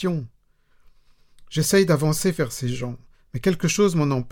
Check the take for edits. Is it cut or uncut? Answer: uncut